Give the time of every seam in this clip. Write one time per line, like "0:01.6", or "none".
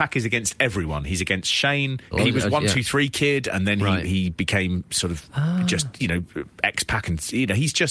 0:02.1

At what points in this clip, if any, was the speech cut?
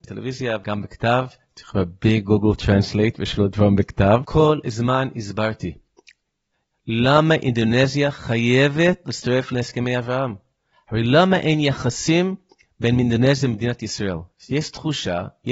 0:10.7

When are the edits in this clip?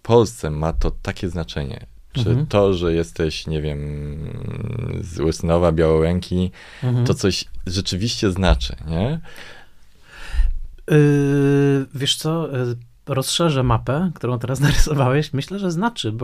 none

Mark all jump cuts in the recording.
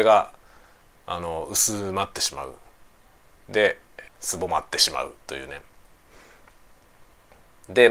0:04.1

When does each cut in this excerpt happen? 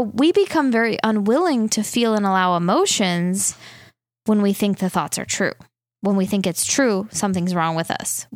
none

